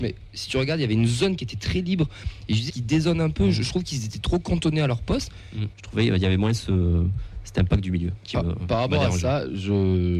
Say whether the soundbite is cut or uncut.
cut